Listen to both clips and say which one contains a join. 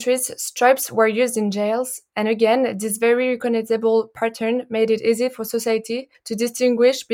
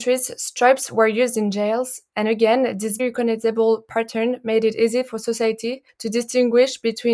second; 1 cut; at 3.0 s

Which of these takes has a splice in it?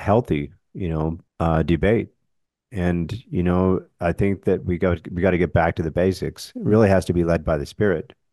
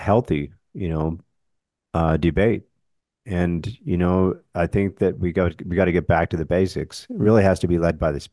first; 1 cut; at 1.3 s

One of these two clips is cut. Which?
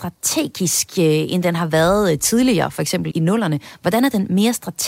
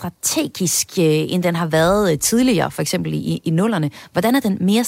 first; 1 cut; at 3.1 s

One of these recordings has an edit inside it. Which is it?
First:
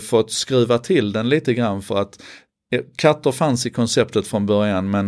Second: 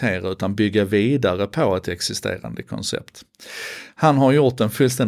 second; 1 cut; at 3.9 s

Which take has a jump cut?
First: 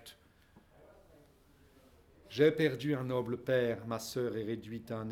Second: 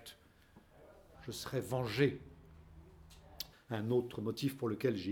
second; 2 cuts; at 1.1 s, 3.5 s

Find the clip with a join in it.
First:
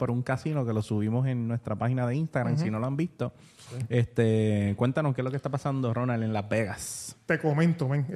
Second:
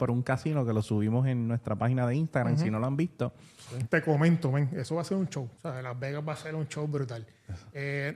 second; 2 cuts; at 3.9 s, 5.6 s

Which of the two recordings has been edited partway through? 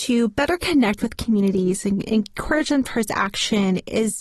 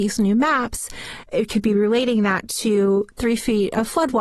second; 1 cut; at 1.2 s

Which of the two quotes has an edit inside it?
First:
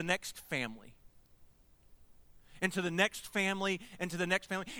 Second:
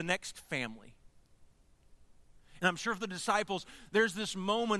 second; 1 cut; at 2.6 s

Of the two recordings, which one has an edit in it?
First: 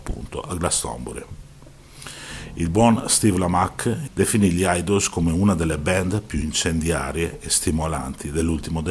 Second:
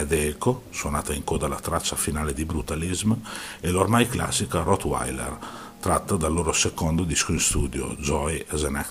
first; 1 cut; at 4.1 s

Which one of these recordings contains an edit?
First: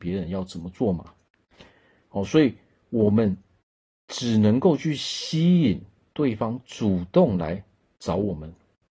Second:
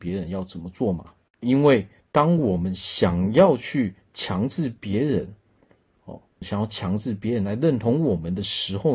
second; 2 cuts; at 1.4 s, 6.4 s

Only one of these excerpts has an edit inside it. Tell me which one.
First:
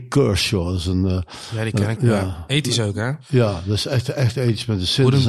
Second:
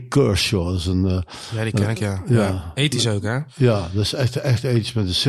first; 1 cut; at 2.0 s

